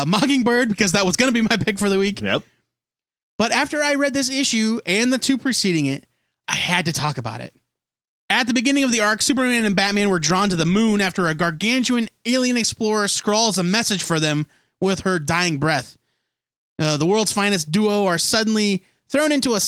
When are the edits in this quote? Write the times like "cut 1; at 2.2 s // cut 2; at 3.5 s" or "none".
cut 1; at 6.4 s